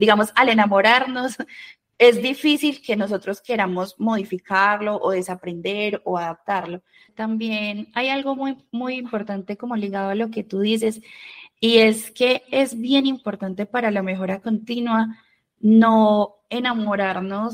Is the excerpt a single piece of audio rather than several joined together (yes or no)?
no